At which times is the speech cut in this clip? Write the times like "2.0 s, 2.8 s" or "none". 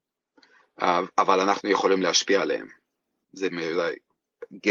3.2 s